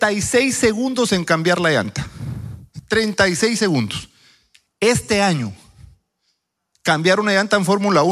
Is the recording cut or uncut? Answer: uncut